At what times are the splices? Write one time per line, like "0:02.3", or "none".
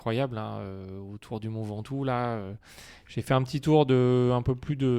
none

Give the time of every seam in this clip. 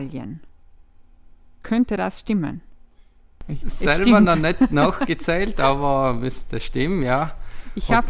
0:03.6

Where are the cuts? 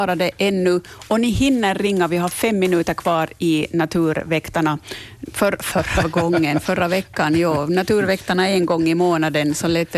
0:05.3

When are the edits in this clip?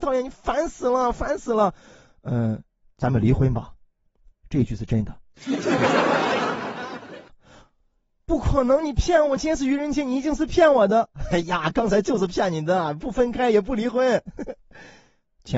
0:09.4

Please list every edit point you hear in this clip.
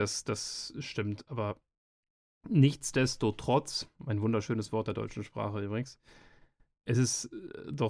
0:03.9

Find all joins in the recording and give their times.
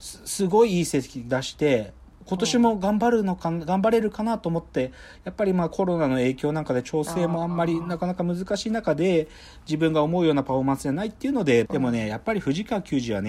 0:11.7

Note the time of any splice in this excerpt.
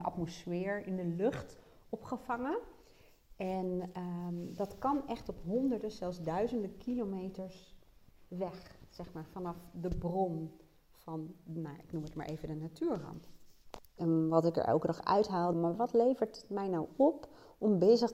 0:14.0
0:15.5

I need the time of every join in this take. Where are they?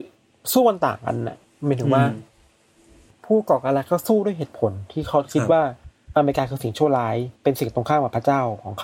0:07.4

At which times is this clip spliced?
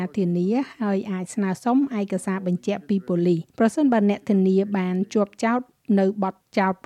0:03.5

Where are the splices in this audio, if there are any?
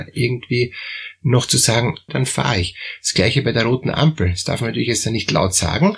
0:02.1

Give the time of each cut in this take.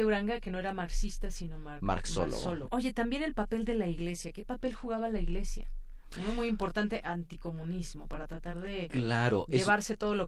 0:02.7

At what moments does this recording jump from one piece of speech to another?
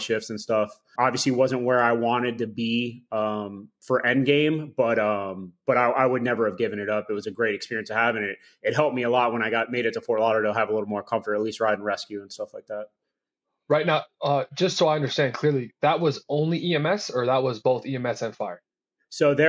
0:01.0

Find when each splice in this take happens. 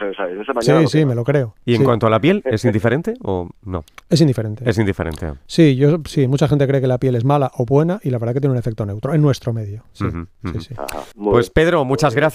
0:11.1

